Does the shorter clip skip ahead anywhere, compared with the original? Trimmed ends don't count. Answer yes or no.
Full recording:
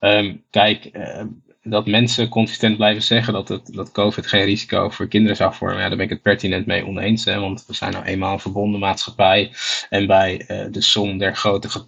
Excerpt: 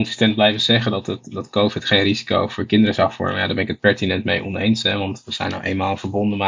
no